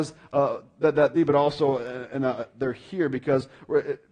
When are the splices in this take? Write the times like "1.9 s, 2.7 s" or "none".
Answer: 1.1 s